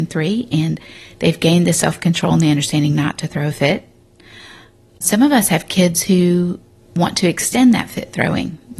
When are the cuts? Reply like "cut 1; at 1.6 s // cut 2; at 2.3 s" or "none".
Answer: none